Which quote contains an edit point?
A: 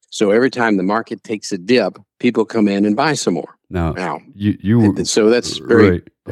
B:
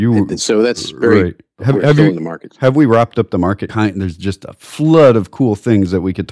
B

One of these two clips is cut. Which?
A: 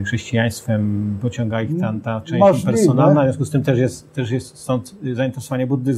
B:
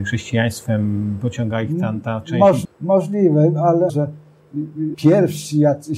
B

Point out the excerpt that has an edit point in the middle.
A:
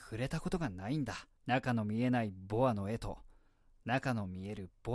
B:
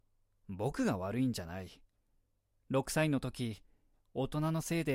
A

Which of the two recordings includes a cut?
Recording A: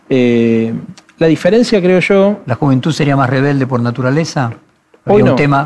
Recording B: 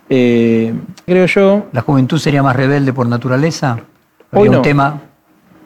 B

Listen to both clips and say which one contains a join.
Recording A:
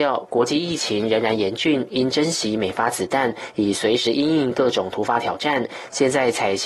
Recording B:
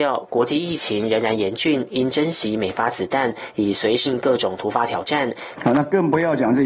B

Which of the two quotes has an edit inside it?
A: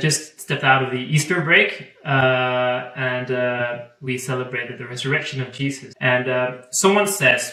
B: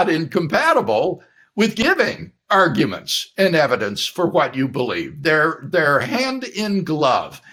A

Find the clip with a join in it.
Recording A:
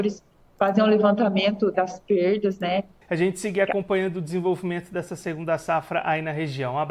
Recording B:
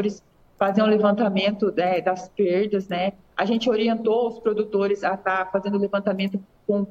A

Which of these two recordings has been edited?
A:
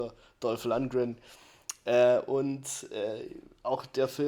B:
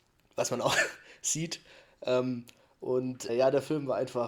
B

